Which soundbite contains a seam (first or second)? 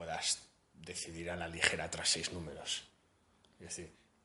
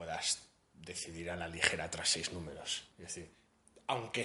second